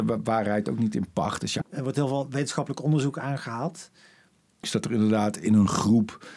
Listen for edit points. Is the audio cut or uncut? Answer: cut